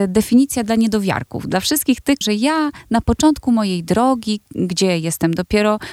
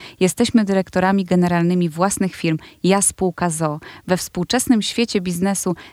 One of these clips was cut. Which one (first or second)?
first